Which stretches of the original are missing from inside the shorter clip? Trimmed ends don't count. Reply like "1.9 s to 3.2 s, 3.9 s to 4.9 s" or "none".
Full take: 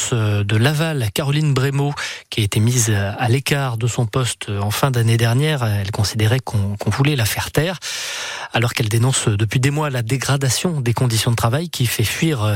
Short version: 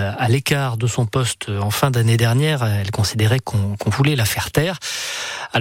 none